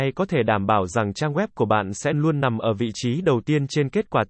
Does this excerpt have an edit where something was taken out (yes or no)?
yes